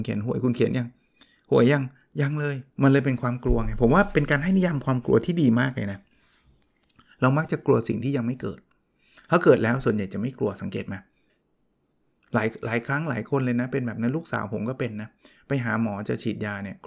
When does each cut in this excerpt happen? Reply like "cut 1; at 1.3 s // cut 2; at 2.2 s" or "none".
cut 1; at 2.7 s